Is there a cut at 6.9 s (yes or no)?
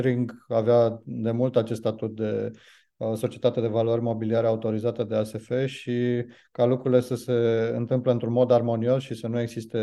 no